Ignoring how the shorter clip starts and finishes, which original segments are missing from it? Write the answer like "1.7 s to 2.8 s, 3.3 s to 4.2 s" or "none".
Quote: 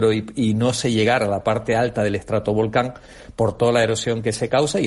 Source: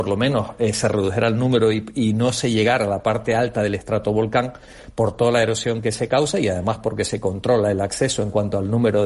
none